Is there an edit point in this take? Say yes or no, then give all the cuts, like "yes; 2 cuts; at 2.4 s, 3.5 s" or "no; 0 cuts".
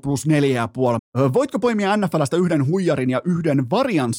yes; 1 cut; at 1.0 s